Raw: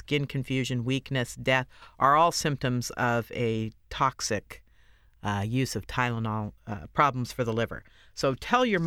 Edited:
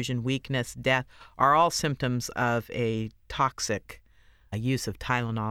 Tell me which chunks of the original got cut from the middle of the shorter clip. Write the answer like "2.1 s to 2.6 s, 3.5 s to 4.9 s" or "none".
5.1 s to 5.4 s